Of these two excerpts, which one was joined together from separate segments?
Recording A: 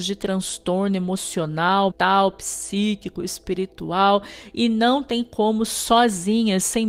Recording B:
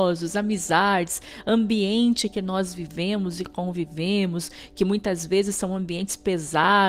A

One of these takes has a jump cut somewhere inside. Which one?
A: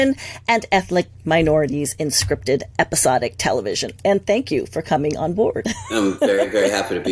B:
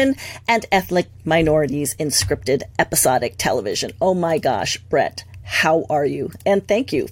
A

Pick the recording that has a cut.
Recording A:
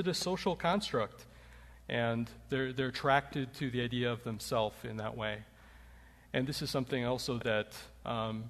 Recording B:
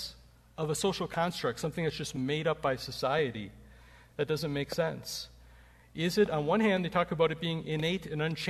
A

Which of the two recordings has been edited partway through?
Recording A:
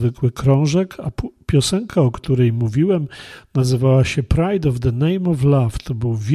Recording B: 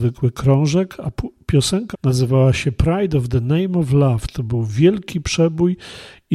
B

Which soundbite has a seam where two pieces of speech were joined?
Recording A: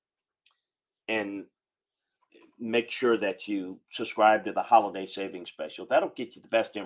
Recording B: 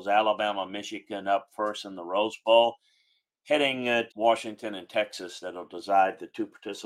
B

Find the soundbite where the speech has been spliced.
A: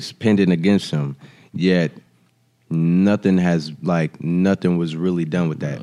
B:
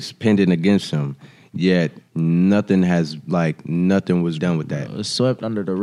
B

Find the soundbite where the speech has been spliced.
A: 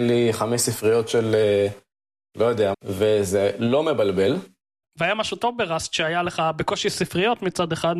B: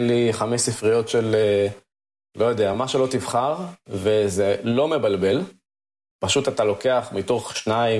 A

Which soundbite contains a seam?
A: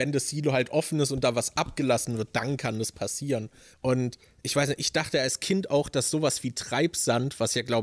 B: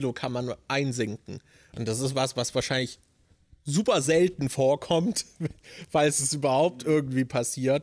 A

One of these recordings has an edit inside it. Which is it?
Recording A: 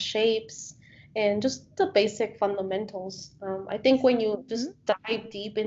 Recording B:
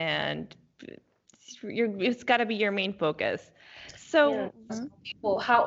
B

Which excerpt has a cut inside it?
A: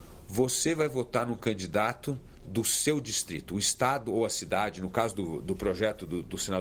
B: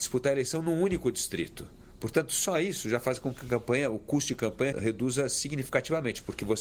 B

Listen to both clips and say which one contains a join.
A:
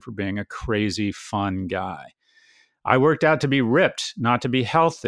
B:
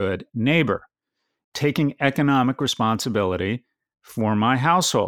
B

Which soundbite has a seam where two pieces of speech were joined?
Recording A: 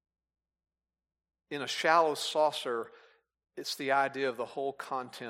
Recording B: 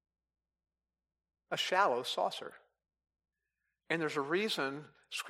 B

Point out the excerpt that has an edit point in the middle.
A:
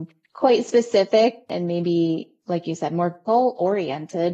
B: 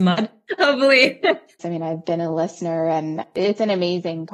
B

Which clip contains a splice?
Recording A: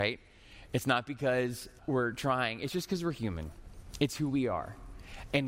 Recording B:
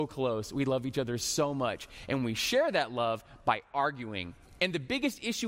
A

